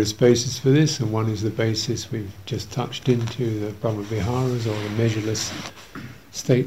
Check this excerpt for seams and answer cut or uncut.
uncut